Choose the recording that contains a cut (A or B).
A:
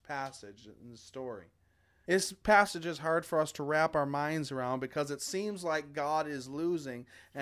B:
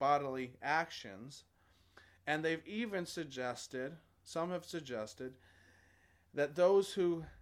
A